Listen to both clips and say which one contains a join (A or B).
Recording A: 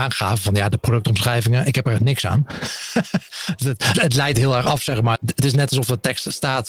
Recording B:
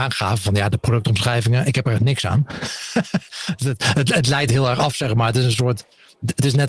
A